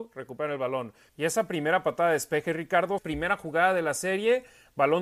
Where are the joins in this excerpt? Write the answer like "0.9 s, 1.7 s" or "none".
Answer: 1.1 s, 3.0 s